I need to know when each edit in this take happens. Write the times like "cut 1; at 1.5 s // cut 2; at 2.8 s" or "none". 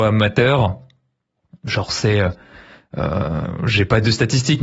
none